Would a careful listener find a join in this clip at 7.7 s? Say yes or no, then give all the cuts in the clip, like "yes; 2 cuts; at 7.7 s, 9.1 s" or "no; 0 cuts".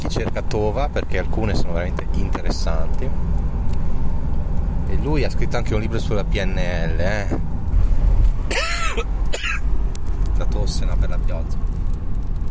yes; 1 cut; at 7.7 s